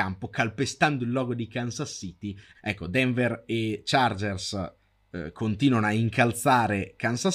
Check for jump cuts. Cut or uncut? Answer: cut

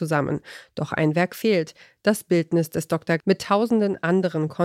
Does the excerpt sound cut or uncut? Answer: cut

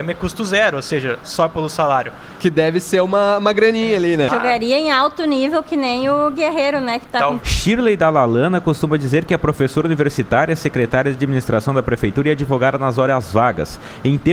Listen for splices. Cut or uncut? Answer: cut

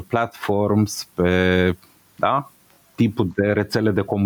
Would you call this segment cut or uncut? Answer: uncut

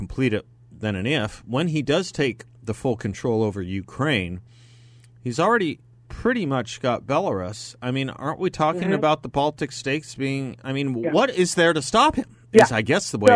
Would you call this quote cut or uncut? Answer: uncut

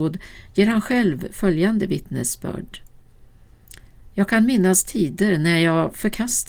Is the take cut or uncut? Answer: uncut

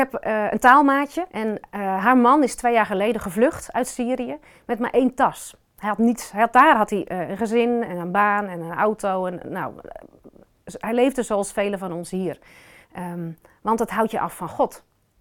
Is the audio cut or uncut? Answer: cut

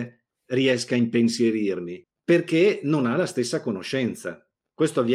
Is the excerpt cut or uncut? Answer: uncut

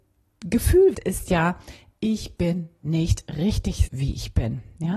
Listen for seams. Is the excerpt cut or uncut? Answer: cut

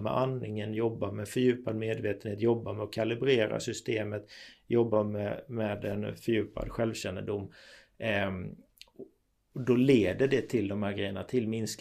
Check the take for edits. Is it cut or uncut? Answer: uncut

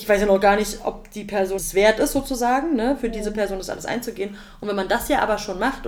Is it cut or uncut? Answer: cut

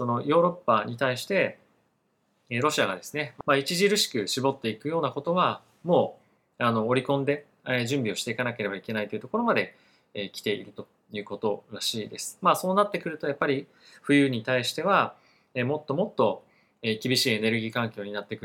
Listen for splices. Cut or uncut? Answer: cut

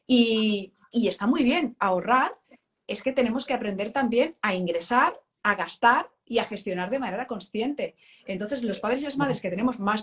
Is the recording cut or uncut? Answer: cut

